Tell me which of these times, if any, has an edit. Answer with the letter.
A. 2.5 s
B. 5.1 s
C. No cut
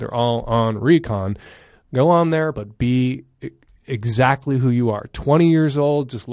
A